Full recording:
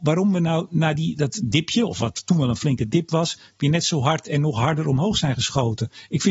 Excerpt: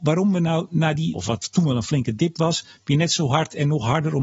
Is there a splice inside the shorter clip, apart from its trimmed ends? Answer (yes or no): yes